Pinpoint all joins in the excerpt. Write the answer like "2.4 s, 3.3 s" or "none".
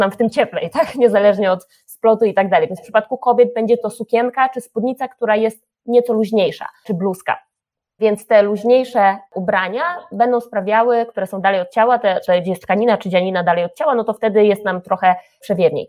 none

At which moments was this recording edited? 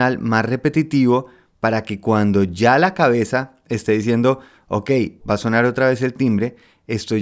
5.2 s

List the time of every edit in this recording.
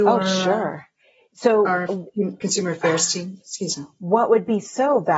none

